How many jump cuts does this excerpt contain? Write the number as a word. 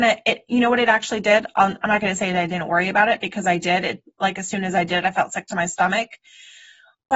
zero